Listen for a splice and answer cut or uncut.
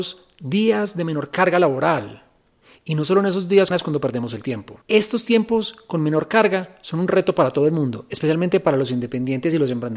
cut